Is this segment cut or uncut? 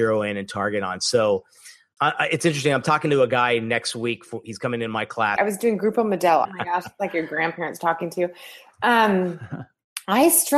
cut